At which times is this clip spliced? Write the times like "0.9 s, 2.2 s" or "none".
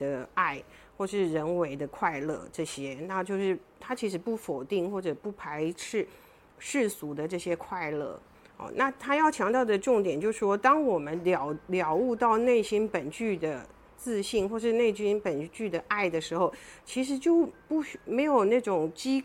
none